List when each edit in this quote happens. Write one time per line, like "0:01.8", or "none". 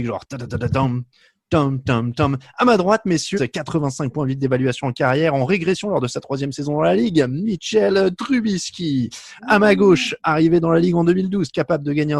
0:03.3